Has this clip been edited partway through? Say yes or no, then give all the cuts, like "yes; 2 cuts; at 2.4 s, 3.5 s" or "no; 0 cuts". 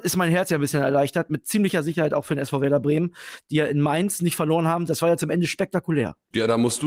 no; 0 cuts